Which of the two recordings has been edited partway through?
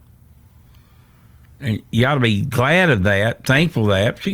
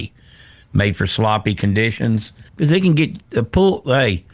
second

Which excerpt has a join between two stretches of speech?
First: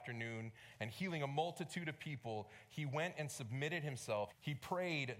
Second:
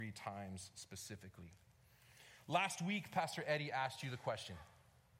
first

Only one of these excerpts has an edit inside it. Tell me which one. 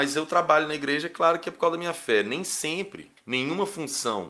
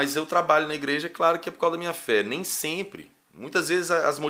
first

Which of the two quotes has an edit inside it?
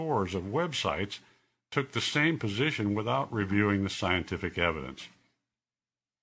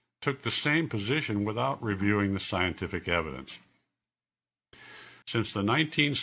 second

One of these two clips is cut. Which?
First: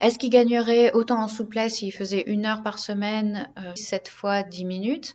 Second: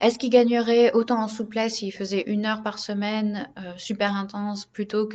first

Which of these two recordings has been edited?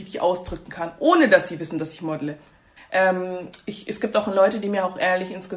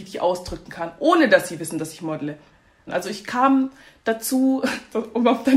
first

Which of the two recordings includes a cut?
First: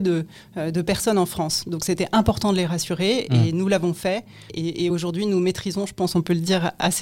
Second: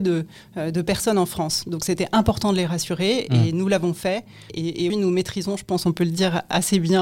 second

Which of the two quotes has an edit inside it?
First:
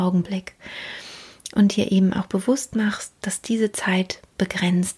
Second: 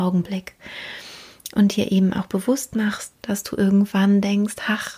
second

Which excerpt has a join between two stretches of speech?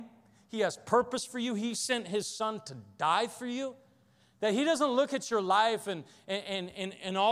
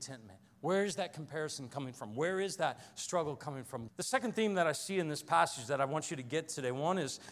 second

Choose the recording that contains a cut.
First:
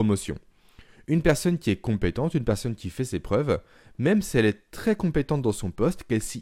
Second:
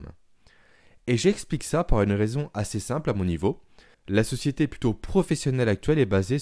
second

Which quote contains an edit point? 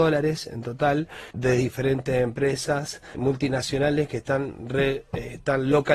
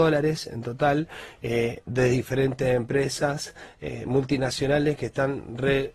first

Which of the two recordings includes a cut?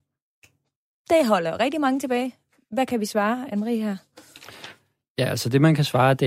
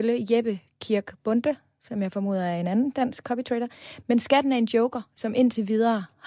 first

